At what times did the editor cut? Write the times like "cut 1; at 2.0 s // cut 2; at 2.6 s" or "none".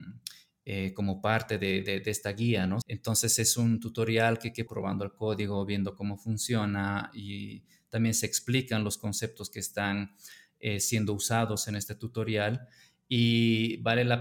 cut 1; at 2.8 s // cut 2; at 4.7 s

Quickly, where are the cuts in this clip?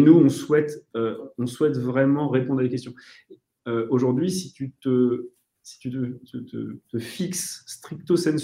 cut 1; at 3.6 s // cut 2; at 6.8 s

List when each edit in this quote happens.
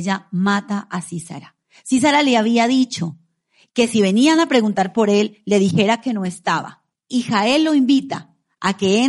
cut 1; at 6.9 s

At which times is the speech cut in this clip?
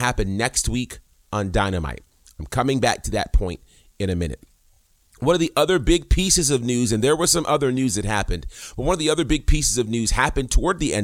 none

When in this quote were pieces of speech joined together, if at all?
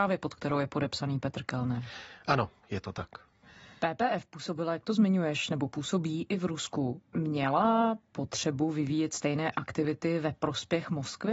none

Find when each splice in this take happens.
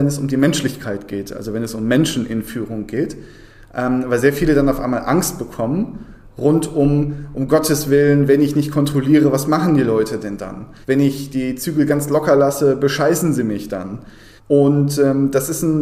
cut 1; at 10.8 s // cut 2; at 14.4 s

